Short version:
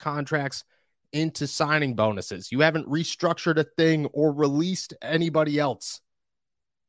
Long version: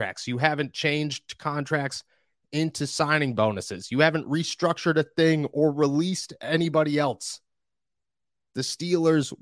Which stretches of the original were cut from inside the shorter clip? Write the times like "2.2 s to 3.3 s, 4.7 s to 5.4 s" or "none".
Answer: none